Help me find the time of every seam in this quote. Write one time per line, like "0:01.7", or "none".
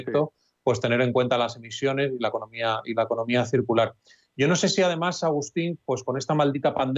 none